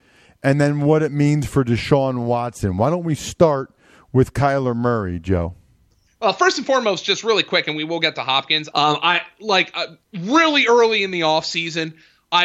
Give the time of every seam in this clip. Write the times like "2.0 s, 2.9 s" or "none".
8.7 s, 10.1 s